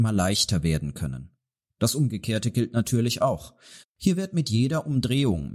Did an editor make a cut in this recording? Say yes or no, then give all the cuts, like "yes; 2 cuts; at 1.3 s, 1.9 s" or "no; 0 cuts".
yes; 1 cut; at 3.8 s